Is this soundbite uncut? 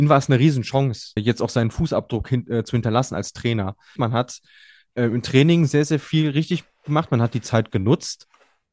no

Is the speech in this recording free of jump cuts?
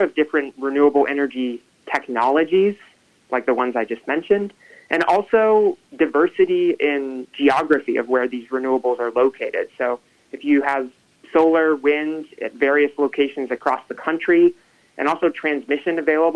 yes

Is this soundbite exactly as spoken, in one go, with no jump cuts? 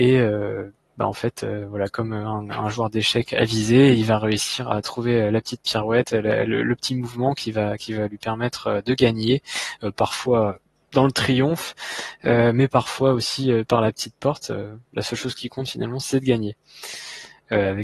yes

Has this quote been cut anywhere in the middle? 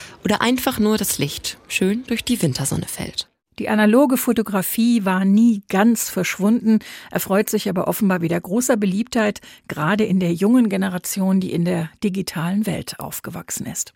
no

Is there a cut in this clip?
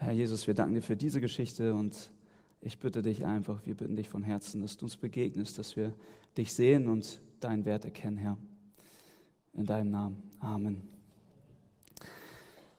no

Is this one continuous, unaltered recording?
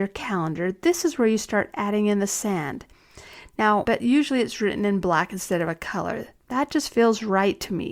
no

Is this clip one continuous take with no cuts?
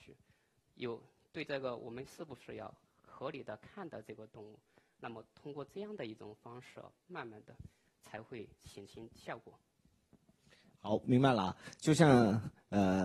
yes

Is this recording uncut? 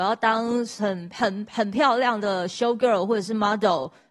yes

